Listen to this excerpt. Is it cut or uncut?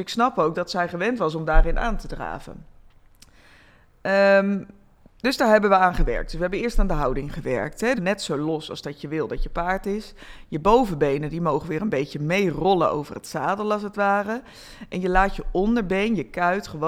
cut